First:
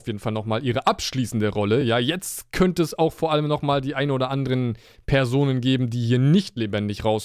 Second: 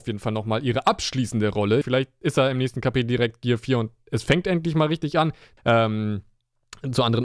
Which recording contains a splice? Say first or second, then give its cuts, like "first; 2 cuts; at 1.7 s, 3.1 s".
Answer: second; 2 cuts; at 1.8 s, 5.6 s